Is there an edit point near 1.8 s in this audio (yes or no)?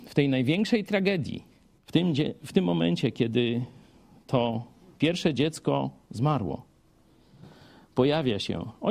yes